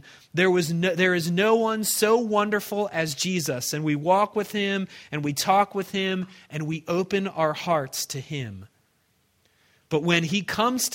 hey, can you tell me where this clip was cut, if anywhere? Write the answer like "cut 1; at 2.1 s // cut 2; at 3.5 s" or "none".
none